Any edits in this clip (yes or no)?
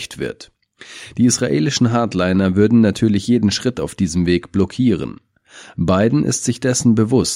no